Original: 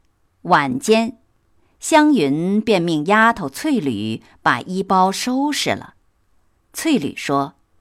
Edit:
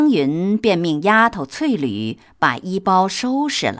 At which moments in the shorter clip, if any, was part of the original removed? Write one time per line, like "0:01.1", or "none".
none